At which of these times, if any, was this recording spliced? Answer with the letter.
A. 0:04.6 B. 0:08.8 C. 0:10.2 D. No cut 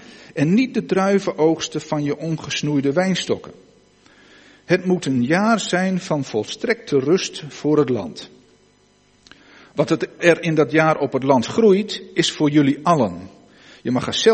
C